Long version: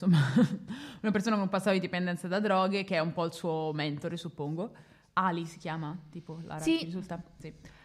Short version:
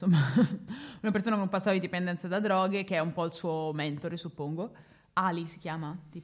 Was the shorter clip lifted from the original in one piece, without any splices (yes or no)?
yes